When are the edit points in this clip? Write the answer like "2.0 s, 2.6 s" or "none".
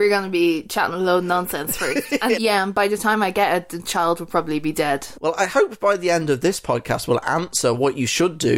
2.3 s, 5.1 s

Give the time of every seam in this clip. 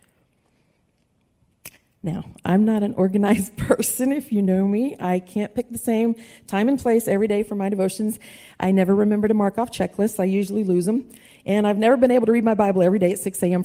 none

